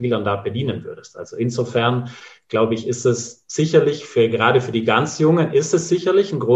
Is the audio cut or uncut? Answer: uncut